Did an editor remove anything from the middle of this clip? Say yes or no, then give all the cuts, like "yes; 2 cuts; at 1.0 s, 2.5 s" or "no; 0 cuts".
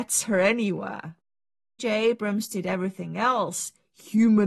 yes; 1 cut; at 1.8 s